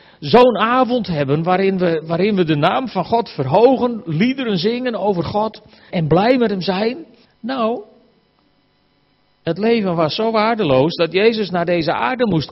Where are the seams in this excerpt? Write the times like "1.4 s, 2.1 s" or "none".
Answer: 5.9 s, 7.2 s